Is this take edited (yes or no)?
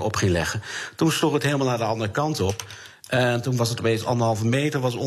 no